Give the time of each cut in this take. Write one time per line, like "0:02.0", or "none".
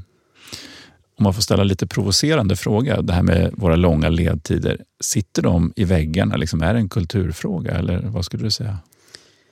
none